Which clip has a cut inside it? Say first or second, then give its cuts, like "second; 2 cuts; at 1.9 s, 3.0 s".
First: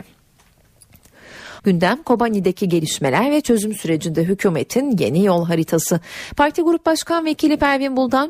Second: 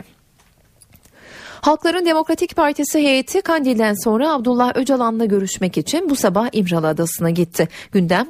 first; 1 cut; at 1.6 s